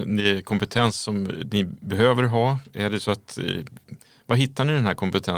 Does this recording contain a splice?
no; 0 cuts

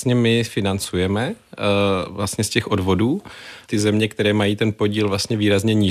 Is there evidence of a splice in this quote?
yes; 1 cut; at 3.6 s

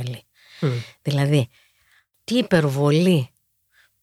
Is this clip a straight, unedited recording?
yes; 0 cuts

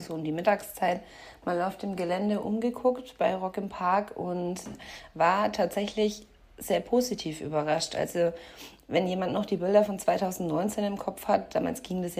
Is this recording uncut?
yes; 0 cuts

